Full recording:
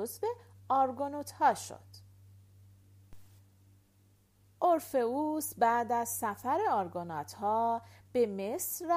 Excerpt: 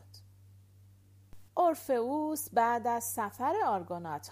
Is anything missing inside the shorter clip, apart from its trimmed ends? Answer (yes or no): yes